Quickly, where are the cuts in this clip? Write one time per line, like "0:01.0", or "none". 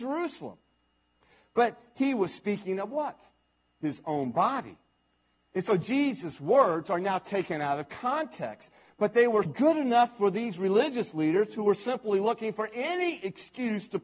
0:09.5